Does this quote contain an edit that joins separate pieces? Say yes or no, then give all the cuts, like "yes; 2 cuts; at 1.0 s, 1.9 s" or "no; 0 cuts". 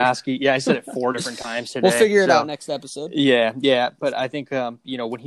no; 0 cuts